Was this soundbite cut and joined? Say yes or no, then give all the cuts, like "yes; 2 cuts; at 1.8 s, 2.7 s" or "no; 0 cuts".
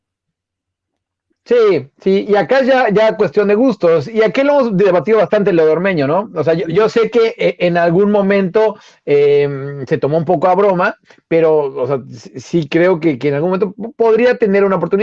yes; 1 cut; at 2.3 s